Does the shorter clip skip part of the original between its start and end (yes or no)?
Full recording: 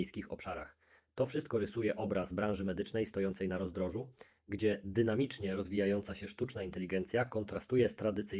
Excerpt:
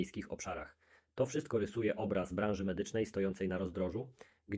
no